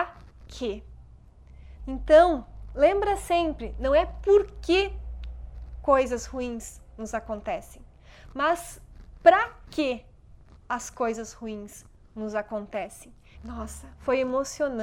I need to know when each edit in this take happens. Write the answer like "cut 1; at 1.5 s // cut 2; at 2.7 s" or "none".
cut 1; at 1.8 s // cut 2; at 13.3 s

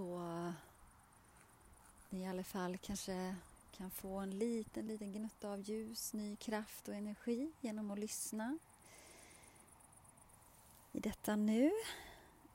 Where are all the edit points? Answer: cut 1; at 4.9 s

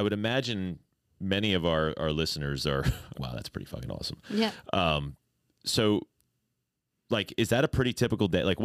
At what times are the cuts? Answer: cut 1; at 3.1 s

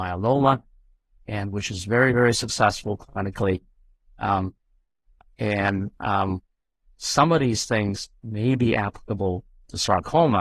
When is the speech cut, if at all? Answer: none

